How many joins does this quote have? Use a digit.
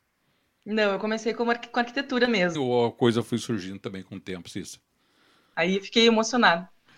2